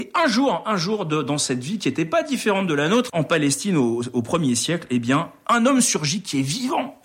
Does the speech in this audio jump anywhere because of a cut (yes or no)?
yes